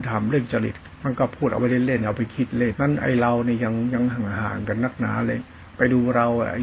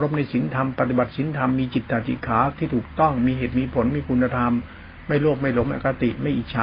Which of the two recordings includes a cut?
first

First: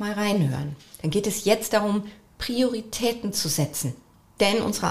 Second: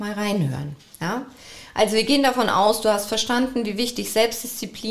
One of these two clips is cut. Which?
first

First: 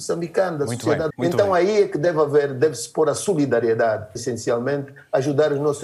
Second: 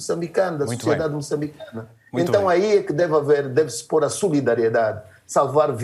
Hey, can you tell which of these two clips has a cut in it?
first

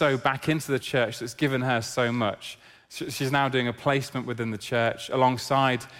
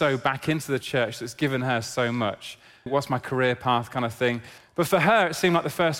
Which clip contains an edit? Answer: second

